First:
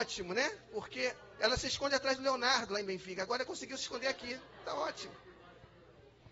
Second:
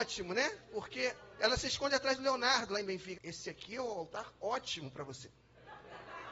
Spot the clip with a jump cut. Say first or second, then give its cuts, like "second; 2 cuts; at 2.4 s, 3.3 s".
second; 1 cut; at 3.1 s